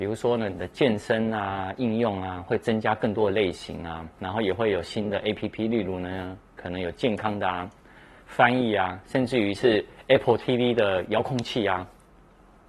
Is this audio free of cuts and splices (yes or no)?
yes